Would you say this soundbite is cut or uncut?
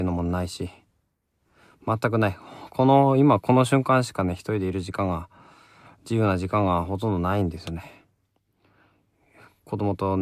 uncut